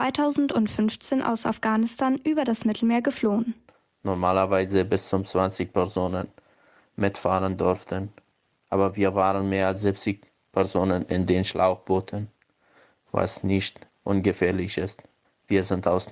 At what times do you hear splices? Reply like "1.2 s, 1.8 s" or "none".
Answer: none